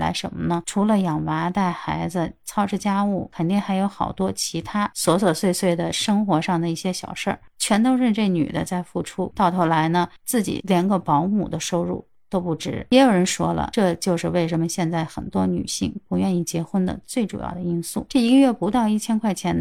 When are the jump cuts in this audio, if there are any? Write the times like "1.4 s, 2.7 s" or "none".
18.1 s